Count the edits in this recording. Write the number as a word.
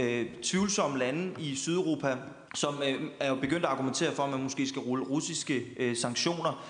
one